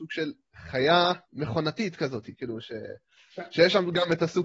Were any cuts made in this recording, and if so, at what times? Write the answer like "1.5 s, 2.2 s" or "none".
1.2 s